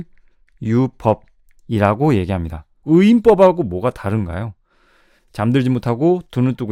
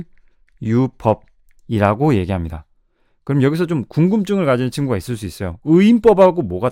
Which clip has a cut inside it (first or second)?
first